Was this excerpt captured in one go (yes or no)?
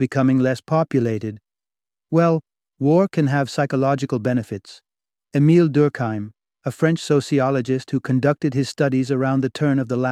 no